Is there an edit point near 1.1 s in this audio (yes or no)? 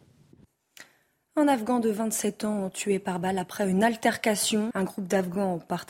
no